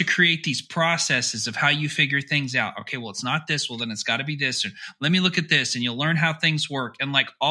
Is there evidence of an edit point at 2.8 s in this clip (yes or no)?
no